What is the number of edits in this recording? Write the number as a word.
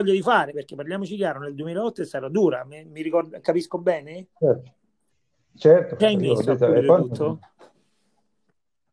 two